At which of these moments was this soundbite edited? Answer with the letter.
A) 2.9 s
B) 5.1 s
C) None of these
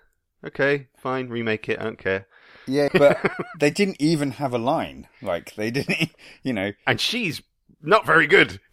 A